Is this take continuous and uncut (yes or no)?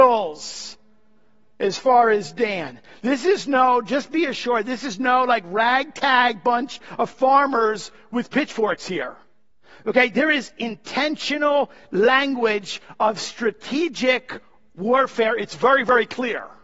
yes